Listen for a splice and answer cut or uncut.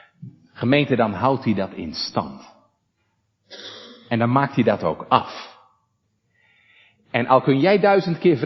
uncut